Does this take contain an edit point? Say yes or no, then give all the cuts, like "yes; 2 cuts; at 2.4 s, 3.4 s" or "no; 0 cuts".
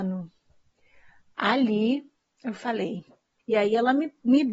yes; 1 cut; at 3.4 s